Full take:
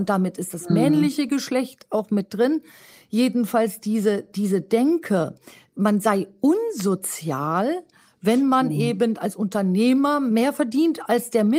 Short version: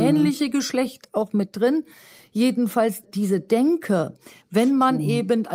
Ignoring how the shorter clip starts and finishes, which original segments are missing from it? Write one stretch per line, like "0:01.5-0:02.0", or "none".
0:03.8-0:04.2
0:05.6-0:08.1